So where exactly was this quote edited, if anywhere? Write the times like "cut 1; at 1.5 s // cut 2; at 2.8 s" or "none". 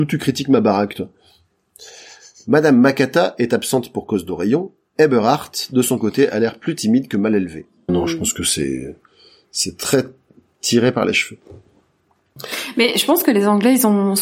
cut 1; at 7.9 s